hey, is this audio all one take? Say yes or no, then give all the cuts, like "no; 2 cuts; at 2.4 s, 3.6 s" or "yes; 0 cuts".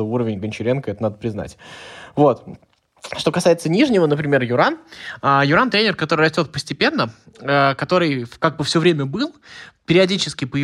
yes; 0 cuts